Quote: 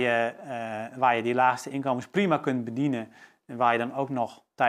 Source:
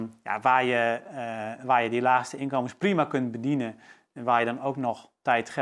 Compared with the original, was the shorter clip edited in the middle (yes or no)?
no